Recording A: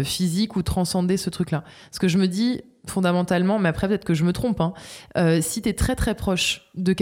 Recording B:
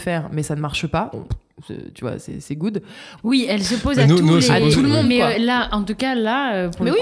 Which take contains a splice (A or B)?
B